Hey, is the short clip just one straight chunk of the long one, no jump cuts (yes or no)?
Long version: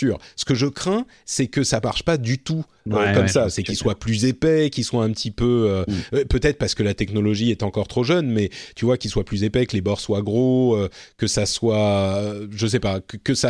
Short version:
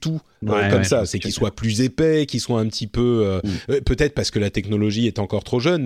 yes